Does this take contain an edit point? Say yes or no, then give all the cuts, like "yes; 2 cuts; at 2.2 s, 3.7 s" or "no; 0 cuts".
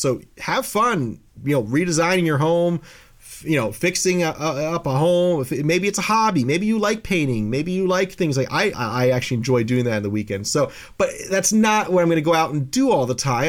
yes; 1 cut; at 8.7 s